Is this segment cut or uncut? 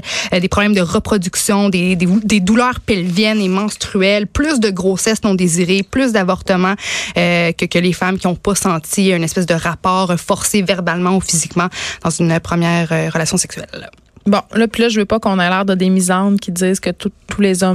uncut